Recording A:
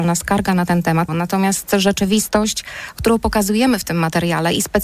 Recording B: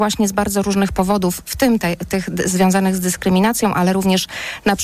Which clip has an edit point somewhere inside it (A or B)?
A